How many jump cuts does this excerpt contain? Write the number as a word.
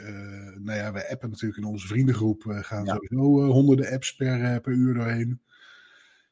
zero